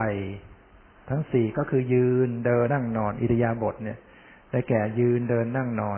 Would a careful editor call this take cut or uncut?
cut